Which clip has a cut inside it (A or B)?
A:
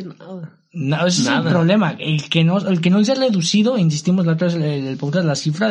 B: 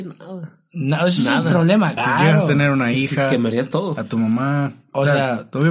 B